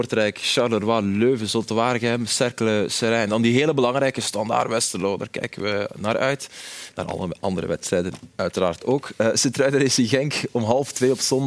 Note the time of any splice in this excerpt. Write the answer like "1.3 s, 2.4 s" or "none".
none